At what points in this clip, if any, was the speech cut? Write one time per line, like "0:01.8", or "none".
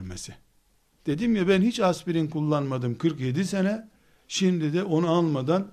0:01.0